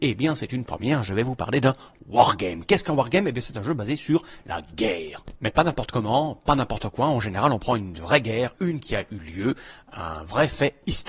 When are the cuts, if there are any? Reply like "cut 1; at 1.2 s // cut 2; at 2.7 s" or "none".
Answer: none